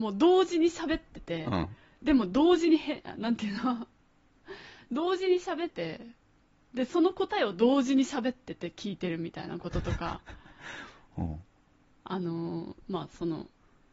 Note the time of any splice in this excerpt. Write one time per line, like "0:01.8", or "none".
0:05.7